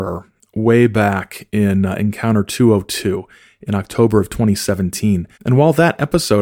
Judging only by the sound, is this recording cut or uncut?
cut